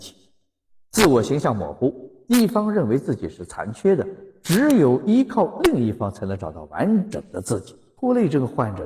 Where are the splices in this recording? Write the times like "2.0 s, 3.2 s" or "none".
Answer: 8.0 s